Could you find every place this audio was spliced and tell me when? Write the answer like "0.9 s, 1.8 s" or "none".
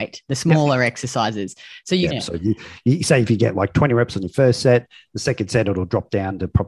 2.1 s